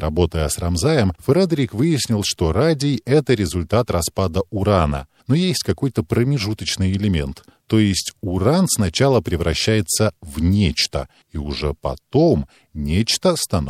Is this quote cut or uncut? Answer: uncut